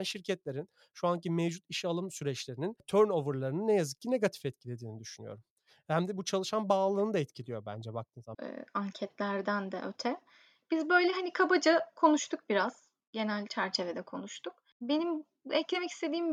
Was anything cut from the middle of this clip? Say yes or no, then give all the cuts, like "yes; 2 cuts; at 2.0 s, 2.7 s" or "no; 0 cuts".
yes; 1 cut; at 8.3 s